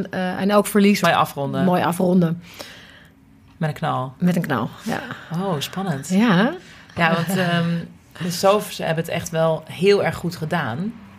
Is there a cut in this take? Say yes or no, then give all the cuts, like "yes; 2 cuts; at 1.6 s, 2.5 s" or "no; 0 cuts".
yes; 1 cut; at 1.0 s